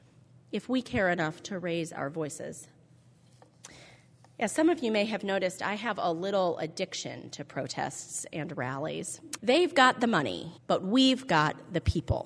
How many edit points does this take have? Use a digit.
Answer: 2